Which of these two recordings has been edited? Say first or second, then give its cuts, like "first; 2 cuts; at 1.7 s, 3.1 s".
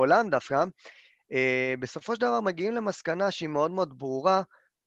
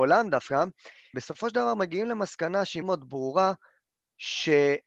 second; 2 cuts; at 1.1 s, 2.8 s